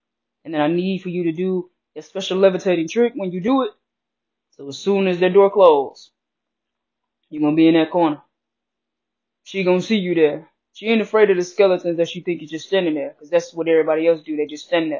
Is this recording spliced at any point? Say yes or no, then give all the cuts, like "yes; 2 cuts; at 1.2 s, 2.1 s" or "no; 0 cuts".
no; 0 cuts